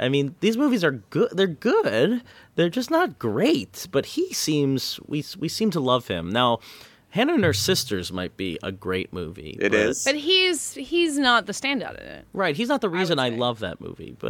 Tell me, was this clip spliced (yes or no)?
no